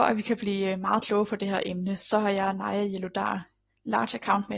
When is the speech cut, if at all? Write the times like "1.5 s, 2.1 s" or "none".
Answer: none